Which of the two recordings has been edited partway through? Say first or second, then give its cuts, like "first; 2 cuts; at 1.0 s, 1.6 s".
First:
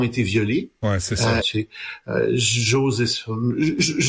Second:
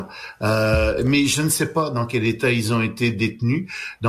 first; 1 cut; at 1.4 s